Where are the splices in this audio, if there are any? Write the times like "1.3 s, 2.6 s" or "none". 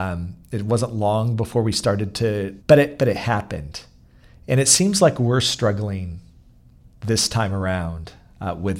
2.6 s